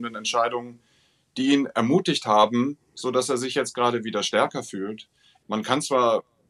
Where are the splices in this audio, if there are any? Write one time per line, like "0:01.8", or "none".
0:05.4